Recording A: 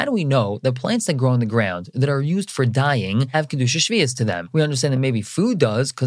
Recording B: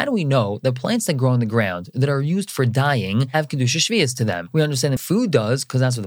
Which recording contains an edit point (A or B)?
B